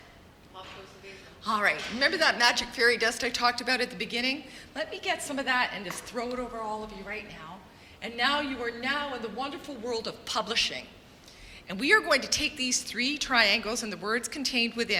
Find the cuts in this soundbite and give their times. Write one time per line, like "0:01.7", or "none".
none